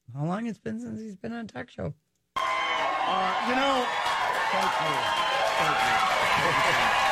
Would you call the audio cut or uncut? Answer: uncut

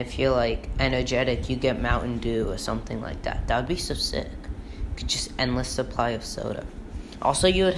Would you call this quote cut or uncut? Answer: uncut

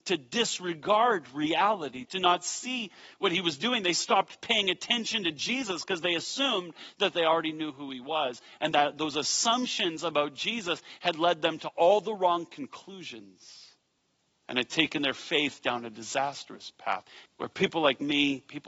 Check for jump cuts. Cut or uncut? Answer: cut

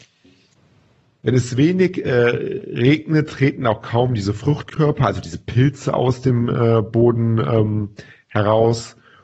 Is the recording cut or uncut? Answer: uncut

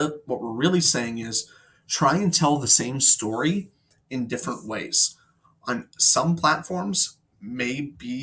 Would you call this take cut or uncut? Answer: uncut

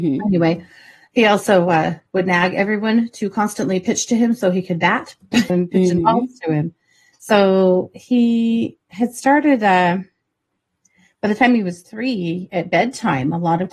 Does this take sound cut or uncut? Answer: cut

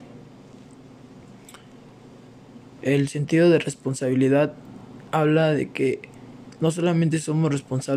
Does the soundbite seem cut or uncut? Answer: cut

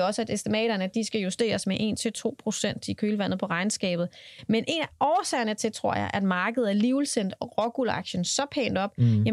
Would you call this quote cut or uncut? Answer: uncut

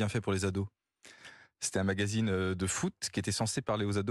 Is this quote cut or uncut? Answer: uncut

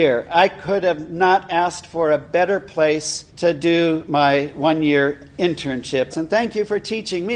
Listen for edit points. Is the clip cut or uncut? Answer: cut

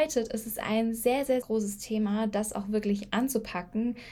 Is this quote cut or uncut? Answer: cut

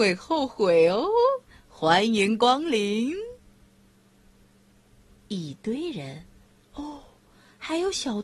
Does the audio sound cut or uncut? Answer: uncut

